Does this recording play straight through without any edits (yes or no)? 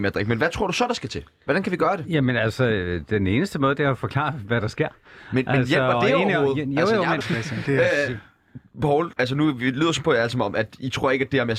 no